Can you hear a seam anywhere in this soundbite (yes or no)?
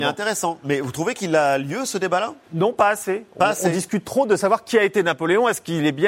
yes